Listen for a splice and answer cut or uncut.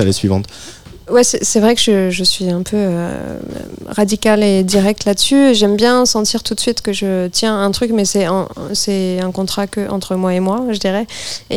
uncut